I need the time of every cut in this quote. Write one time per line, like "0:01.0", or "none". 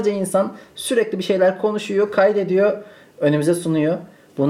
none